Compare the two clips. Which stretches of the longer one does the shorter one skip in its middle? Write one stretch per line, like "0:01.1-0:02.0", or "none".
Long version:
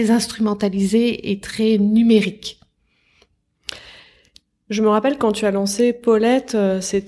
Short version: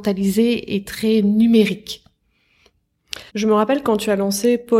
0:03.8-0:04.6